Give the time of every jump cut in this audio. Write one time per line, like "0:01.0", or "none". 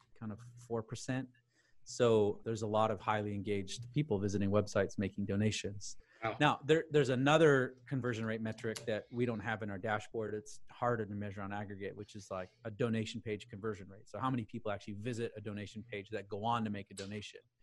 none